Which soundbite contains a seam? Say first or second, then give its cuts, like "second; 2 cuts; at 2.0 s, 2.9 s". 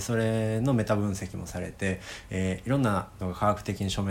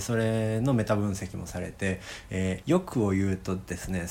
second; 1 cut; at 2.6 s